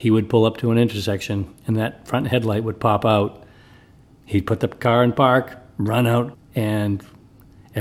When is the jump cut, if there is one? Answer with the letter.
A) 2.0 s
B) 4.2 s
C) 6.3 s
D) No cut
C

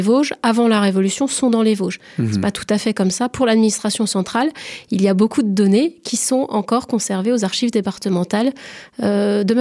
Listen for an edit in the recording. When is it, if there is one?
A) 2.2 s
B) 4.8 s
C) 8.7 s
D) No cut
D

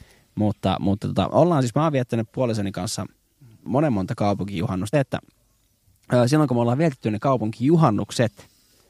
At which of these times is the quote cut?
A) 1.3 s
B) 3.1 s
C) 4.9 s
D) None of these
C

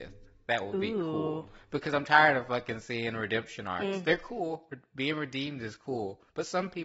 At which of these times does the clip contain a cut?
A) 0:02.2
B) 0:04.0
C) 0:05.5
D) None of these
D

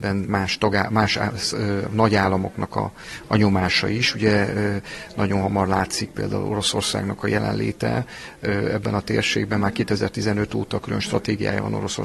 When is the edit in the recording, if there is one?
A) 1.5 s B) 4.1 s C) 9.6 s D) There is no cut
D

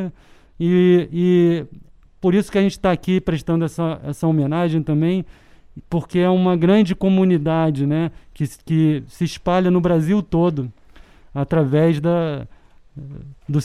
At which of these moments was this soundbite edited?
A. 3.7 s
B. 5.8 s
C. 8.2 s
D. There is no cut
D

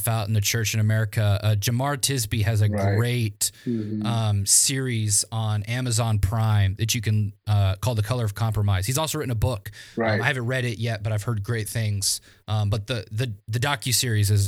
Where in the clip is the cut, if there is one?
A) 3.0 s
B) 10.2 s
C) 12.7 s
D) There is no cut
D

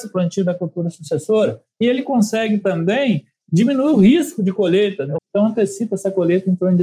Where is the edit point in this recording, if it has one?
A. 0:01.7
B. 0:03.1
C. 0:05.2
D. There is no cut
C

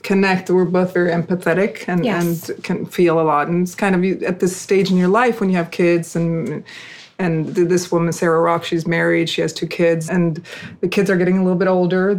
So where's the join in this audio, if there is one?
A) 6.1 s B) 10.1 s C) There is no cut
B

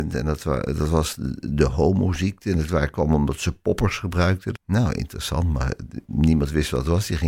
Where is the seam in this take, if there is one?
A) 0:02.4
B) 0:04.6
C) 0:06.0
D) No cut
B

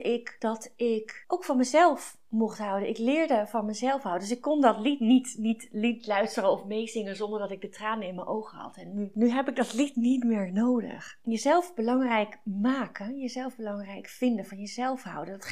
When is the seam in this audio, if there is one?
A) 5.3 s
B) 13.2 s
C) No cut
C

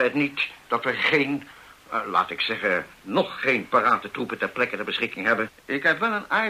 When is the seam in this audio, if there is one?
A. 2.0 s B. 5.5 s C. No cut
B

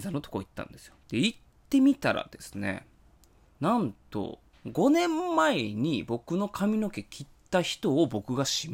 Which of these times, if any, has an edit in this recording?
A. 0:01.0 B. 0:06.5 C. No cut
A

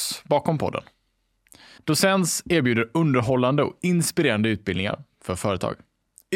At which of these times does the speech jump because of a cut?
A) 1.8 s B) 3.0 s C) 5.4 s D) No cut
A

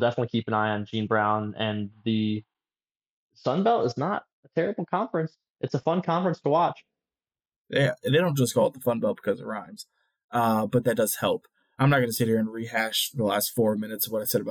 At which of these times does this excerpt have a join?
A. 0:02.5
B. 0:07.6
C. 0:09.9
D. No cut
D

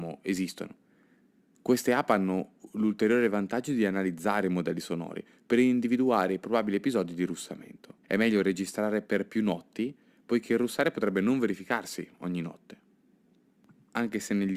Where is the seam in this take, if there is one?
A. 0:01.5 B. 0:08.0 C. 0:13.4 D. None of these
B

